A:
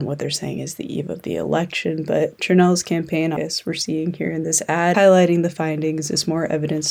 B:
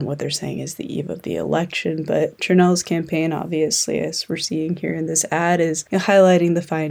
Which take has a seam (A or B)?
A